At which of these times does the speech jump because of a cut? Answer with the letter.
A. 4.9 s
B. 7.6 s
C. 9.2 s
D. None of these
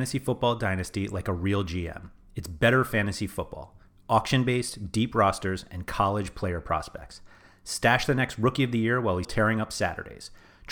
C